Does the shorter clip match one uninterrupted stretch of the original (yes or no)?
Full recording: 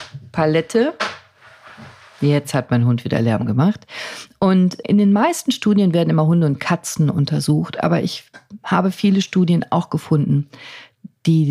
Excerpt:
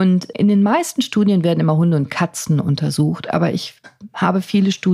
yes